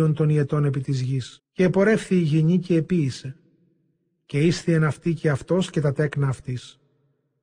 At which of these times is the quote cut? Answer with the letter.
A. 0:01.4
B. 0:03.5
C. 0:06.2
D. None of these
A